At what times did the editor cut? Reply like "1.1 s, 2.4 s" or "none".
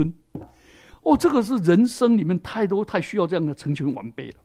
none